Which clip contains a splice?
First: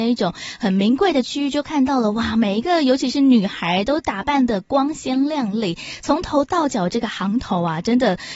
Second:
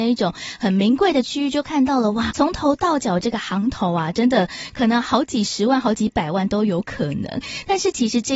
second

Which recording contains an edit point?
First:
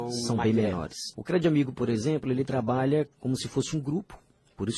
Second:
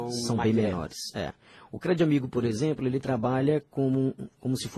first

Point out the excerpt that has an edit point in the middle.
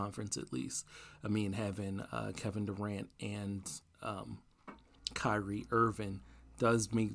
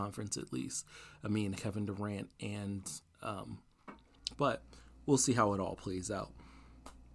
second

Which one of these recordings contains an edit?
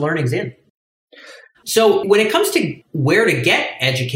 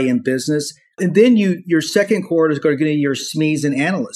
first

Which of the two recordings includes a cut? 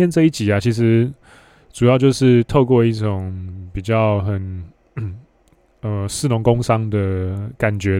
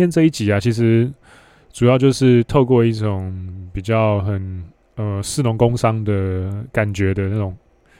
second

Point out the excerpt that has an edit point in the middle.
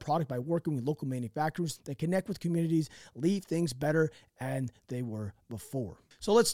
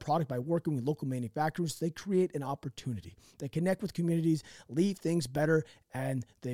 first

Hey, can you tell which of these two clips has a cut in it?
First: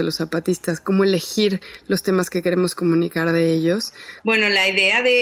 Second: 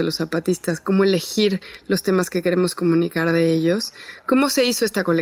first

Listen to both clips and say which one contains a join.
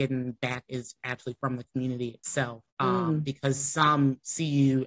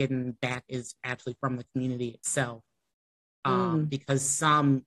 first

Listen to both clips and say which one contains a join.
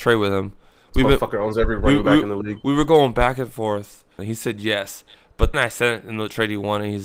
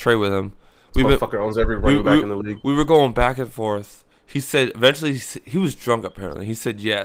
first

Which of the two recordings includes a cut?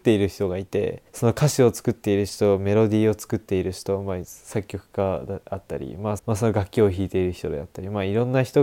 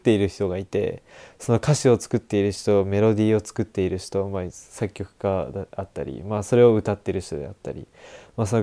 first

